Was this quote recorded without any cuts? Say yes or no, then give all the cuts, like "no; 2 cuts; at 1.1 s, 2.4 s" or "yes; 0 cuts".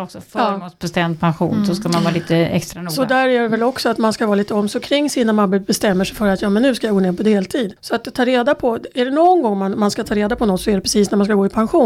yes; 0 cuts